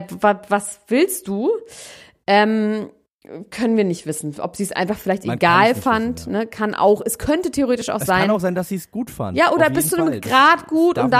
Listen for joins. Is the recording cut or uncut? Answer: uncut